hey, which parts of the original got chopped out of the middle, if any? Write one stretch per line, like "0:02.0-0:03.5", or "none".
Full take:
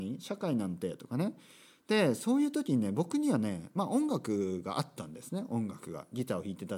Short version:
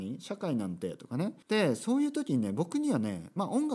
0:01.4-0:01.8